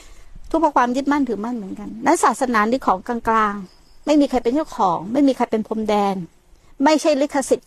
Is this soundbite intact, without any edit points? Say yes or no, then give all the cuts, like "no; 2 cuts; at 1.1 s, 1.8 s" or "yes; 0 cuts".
yes; 0 cuts